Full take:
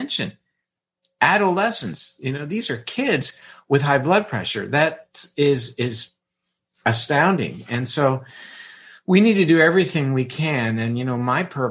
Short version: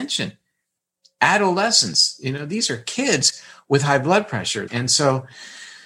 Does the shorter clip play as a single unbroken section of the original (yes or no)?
no